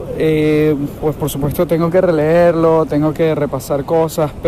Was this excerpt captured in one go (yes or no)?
yes